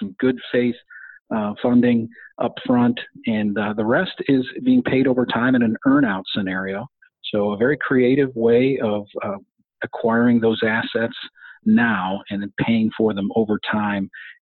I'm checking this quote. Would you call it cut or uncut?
uncut